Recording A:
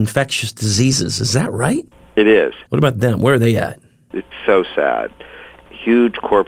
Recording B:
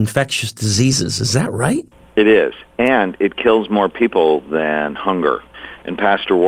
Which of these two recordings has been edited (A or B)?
A